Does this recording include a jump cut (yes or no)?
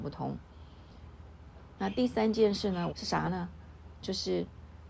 yes